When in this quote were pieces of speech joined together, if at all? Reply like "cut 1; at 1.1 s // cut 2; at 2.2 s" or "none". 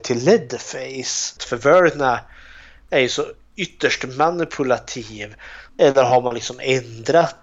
cut 1; at 1.4 s // cut 2; at 5.7 s